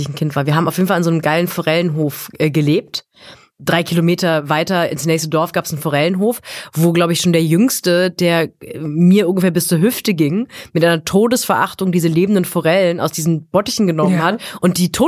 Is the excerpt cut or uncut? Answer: cut